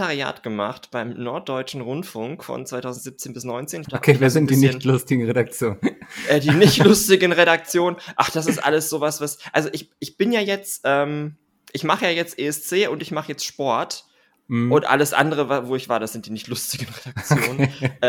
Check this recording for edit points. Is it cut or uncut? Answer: cut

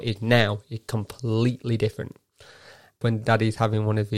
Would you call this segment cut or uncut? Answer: cut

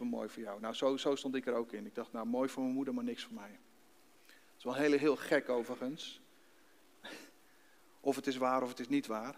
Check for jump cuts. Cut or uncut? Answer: uncut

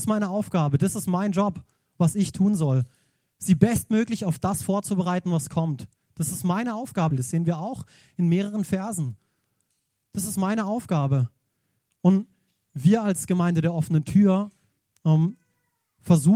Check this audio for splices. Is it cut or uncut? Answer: cut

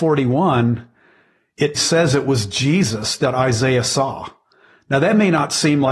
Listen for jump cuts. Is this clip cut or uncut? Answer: cut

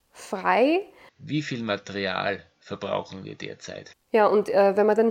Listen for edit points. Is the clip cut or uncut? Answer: cut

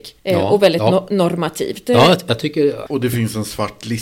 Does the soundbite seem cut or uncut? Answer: uncut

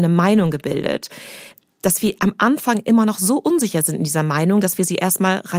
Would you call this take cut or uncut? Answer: uncut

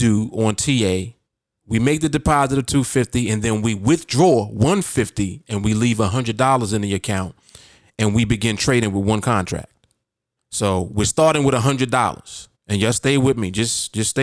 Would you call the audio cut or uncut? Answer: cut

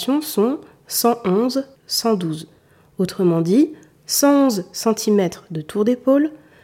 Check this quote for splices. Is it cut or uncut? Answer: cut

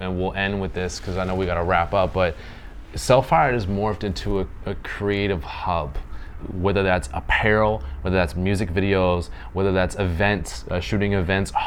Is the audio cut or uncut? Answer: cut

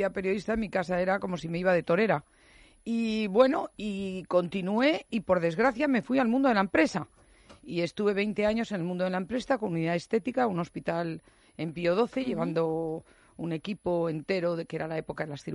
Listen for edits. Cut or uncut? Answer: uncut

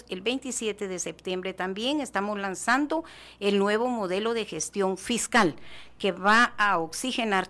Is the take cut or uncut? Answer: uncut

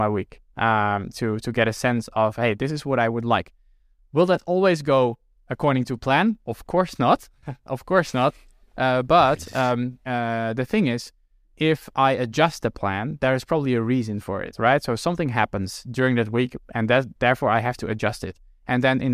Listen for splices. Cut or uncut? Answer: uncut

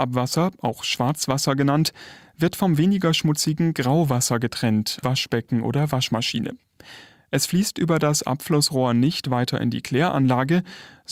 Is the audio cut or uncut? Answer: cut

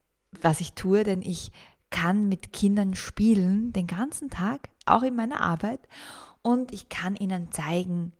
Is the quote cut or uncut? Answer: uncut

